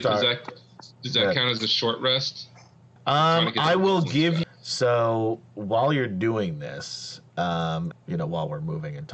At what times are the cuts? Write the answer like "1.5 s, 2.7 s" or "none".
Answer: 3.0 s, 4.4 s, 7.9 s